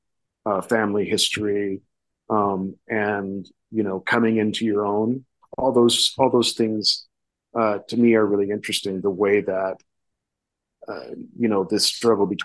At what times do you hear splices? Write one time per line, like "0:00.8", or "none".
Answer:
0:05.4